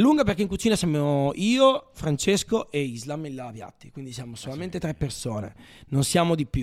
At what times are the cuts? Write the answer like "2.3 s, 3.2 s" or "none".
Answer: none